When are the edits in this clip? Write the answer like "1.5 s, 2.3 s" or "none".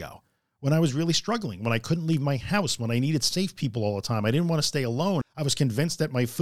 5.2 s